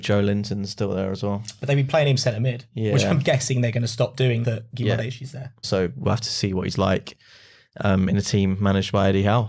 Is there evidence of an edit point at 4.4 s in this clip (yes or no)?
yes